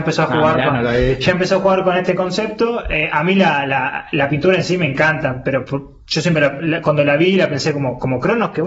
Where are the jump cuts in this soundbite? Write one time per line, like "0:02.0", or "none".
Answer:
none